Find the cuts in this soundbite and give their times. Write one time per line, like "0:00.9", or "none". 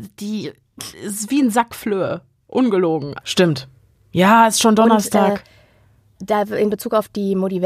0:03.2